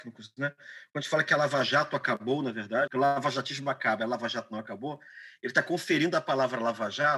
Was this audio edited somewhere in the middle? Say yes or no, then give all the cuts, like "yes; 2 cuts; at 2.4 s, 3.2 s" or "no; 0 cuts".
yes; 1 cut; at 2.9 s